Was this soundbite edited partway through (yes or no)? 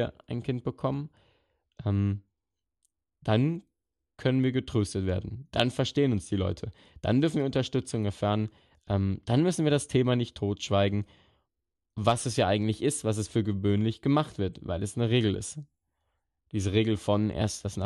no